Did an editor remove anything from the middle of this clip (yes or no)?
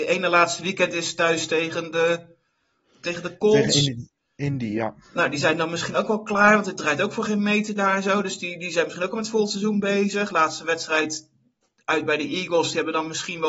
no